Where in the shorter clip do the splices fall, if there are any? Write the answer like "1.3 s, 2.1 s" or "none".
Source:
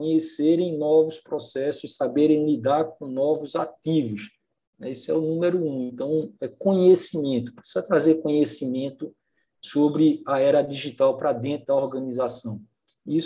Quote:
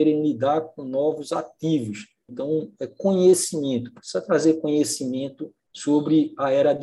2.3 s, 5.6 s